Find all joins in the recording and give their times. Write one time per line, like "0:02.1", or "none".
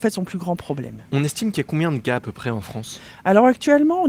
none